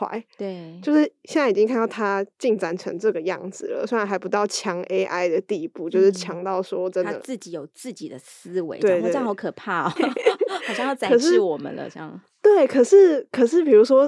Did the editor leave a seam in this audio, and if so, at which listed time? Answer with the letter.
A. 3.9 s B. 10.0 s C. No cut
B